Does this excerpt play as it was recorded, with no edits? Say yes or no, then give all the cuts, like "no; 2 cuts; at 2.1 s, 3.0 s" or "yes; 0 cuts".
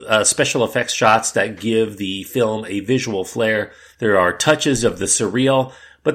no; 1 cut; at 3.9 s